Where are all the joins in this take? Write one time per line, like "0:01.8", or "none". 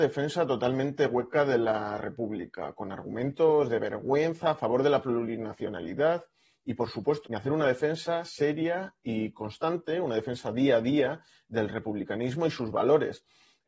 0:07.2